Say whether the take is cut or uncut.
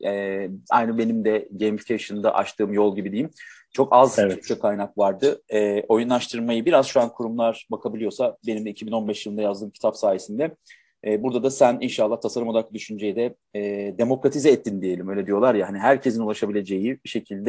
uncut